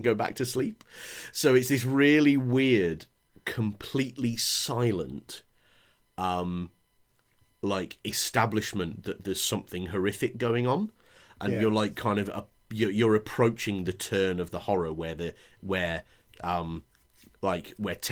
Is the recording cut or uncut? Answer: uncut